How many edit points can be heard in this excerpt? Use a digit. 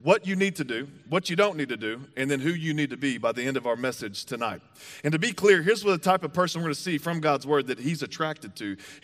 0